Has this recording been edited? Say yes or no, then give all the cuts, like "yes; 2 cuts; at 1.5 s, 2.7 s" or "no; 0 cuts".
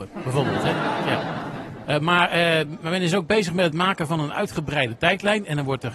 no; 0 cuts